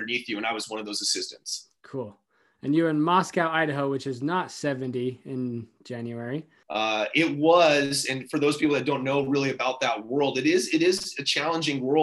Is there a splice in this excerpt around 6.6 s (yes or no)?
yes